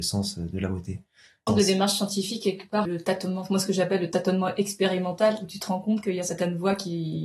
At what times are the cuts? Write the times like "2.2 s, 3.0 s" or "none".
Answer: 1.5 s, 2.8 s